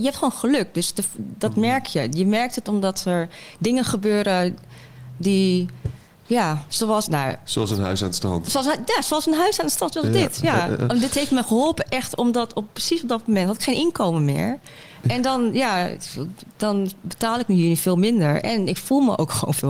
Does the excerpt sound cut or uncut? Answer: uncut